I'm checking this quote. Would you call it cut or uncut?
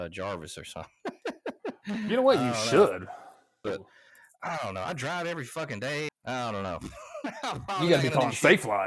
cut